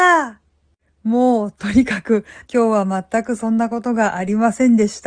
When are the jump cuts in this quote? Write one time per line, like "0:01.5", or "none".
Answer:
0:02.5